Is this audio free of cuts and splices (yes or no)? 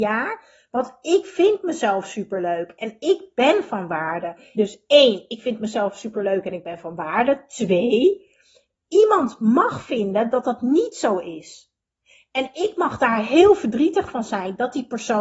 no